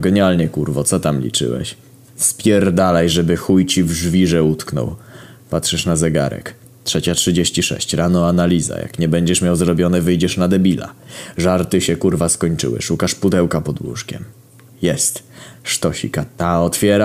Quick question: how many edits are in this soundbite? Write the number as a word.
one